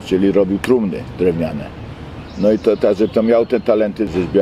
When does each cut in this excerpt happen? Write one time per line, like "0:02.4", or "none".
none